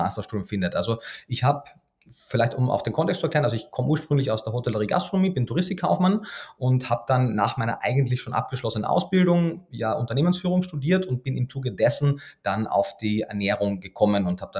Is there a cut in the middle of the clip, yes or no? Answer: no